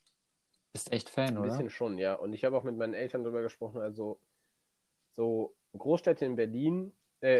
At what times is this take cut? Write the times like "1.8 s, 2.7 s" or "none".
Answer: none